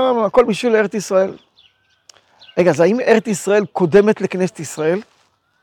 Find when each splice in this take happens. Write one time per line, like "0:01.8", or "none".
none